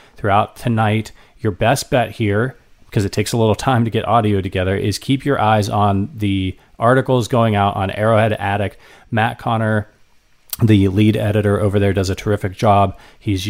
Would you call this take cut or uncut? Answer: uncut